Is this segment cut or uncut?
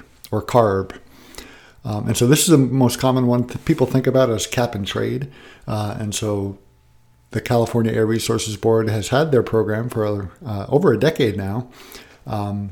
uncut